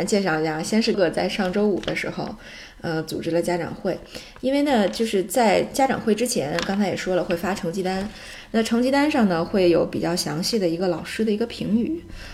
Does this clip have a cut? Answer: yes; 1 cut; at 0.9 s

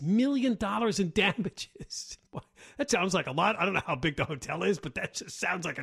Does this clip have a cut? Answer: yes; 1 cut; at 2.9 s

